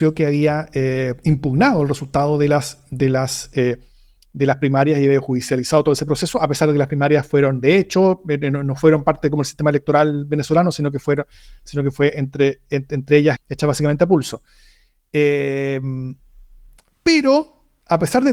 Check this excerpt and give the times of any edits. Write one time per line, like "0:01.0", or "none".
0:13.4